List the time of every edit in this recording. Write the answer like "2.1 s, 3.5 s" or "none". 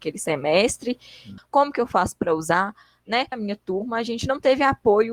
1.4 s, 3.3 s